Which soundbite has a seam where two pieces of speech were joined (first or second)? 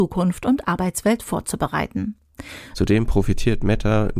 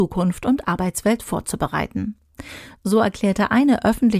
first